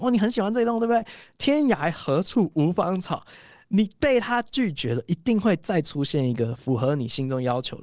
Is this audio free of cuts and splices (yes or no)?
yes